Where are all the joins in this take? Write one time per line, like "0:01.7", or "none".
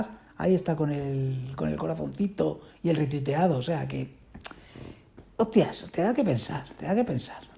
none